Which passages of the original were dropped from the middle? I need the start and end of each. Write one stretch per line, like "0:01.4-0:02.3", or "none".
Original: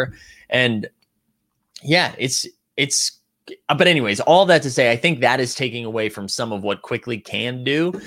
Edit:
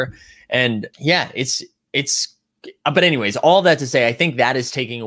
0:00.9-0:01.8